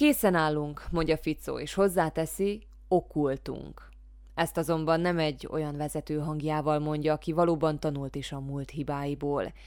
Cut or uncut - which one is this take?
uncut